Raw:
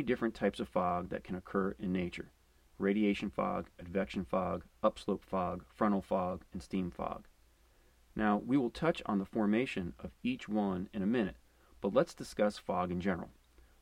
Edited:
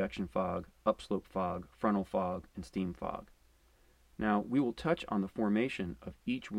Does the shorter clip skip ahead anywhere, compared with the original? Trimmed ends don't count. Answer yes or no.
no